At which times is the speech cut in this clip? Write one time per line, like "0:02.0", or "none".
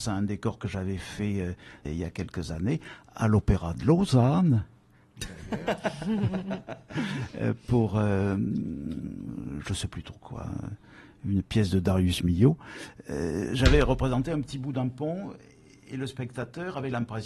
0:01.8